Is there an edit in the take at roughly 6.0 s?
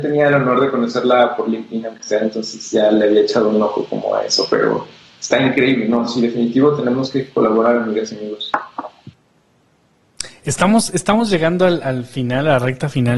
no; 0 cuts

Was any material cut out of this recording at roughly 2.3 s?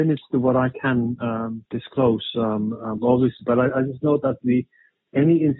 no; 0 cuts

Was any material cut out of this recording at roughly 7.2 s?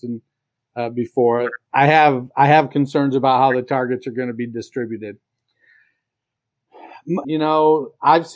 yes; 2 cuts; at 1.7 s, 7.2 s

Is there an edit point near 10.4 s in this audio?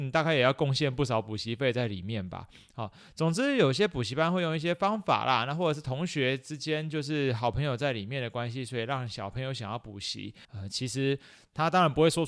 yes; 1 cut; at 10.4 s

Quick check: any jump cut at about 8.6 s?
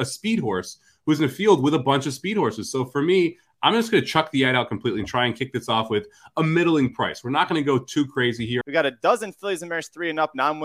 yes; 1 cut; at 8.6 s

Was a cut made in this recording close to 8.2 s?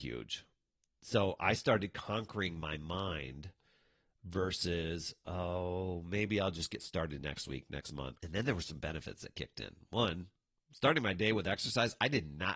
yes; 1 cut; at 8.2 s

